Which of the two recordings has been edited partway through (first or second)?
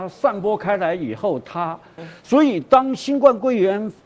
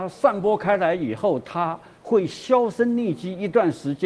first